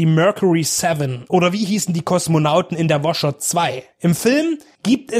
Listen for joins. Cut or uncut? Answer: uncut